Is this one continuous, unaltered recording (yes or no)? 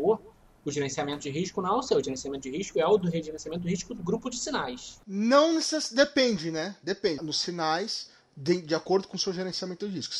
no